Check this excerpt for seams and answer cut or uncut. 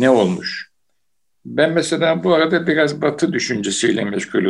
uncut